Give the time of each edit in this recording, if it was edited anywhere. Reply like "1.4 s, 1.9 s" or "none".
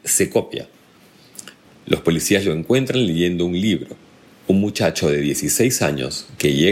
1.6 s, 4.3 s